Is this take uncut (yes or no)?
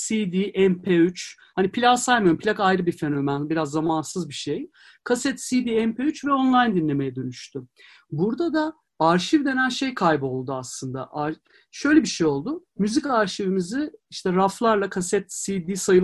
yes